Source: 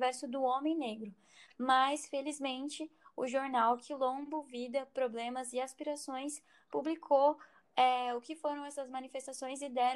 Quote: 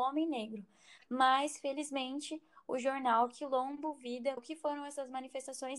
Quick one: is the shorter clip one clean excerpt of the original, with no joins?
no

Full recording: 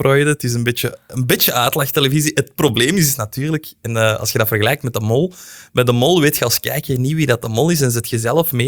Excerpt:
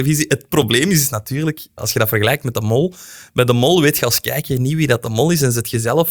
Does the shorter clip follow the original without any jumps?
no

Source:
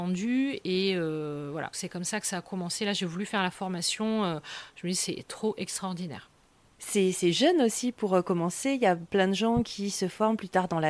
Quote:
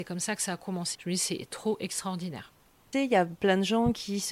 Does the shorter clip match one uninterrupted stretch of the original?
no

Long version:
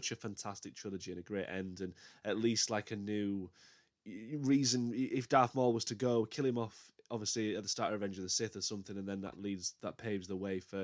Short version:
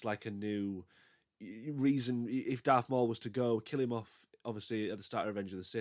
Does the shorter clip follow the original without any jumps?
yes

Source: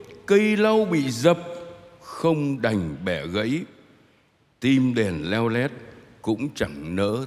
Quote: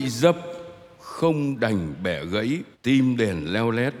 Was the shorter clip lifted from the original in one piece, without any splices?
no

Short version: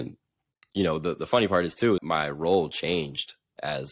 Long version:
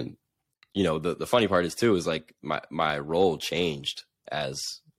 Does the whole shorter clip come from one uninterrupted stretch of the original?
no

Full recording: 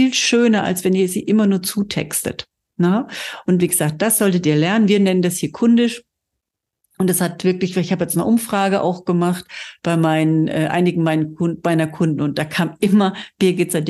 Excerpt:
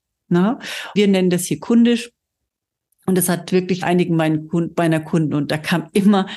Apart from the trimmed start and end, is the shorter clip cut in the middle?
yes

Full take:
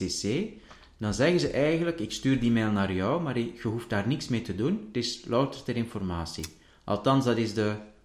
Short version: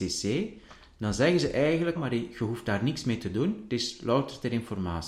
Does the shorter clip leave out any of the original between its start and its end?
yes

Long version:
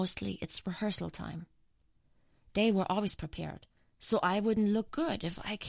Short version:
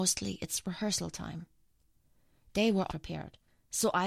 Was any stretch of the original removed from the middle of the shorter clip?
yes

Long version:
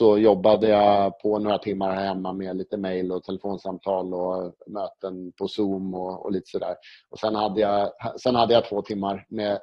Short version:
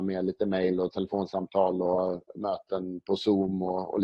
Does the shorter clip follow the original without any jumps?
yes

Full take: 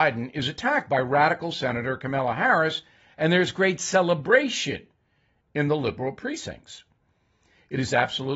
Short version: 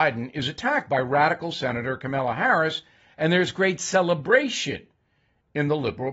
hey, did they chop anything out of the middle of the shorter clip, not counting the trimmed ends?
no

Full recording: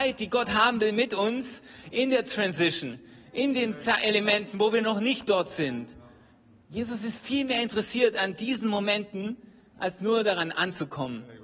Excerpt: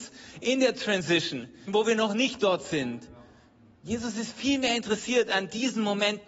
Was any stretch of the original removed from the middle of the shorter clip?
yes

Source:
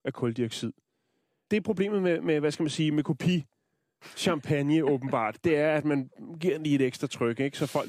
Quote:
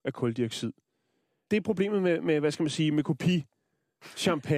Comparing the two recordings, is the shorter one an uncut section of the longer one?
yes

